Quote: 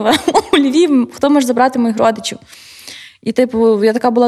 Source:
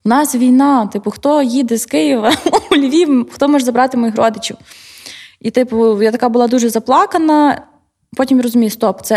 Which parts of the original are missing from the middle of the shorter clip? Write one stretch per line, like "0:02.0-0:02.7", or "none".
none